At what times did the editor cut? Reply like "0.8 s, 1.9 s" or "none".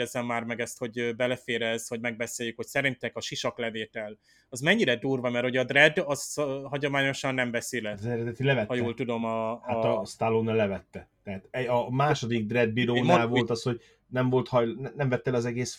none